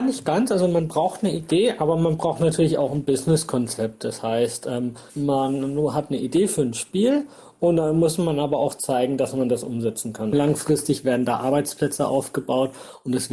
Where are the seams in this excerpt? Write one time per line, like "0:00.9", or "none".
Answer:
0:05.1
0:10.3